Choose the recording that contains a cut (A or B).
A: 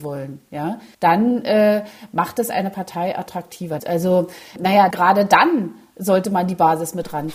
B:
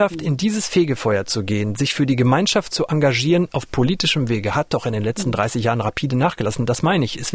A